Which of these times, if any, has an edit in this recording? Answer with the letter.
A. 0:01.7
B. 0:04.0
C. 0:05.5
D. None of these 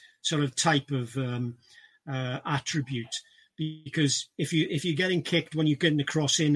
D